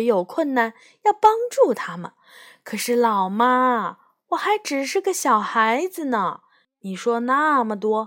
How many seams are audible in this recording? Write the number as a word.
zero